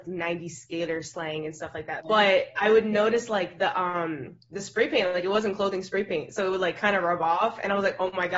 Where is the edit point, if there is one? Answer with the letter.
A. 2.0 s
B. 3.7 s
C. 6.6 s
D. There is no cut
A